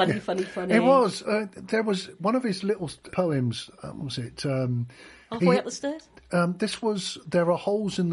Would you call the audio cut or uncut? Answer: cut